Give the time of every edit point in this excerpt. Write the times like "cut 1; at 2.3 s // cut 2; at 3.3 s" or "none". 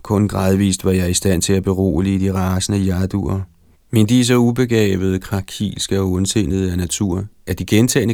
cut 1; at 3.7 s